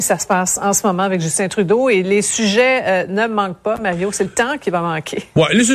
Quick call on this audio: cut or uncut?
uncut